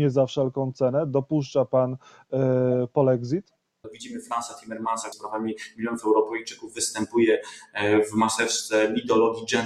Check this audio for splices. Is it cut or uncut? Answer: cut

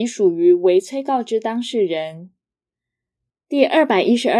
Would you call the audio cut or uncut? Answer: cut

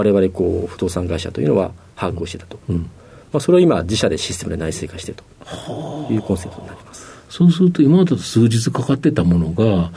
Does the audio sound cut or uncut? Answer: uncut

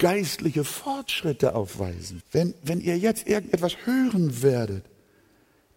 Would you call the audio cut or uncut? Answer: cut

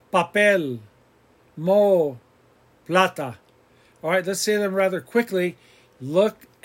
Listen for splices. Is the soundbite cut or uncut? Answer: uncut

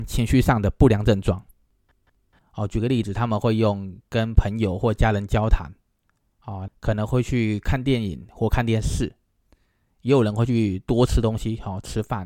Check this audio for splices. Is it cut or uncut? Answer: cut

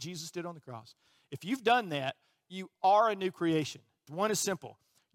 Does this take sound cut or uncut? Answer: cut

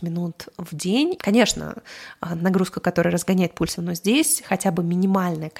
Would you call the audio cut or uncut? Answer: cut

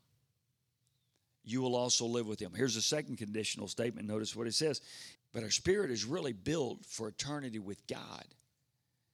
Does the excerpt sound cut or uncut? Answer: cut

